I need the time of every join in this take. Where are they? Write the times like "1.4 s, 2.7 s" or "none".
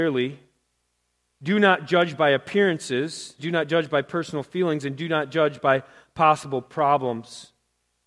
3.4 s